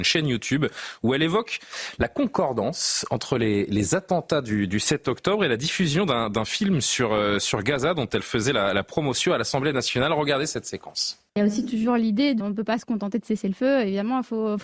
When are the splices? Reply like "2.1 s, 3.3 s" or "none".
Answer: 11.3 s, 12.4 s